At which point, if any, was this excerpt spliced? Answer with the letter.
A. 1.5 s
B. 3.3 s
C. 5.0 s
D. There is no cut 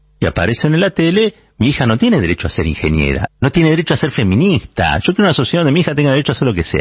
B